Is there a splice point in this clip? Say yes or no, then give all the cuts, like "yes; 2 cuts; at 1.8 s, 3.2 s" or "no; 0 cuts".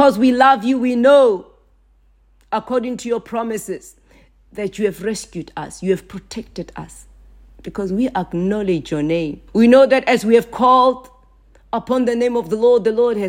yes; 1 cut; at 9.5 s